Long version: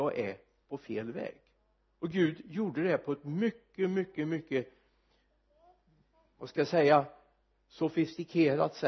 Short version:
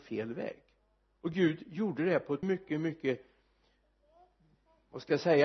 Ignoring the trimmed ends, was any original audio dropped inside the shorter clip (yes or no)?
yes